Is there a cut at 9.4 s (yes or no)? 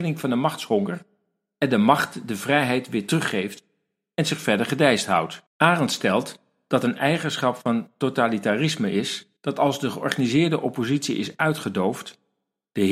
yes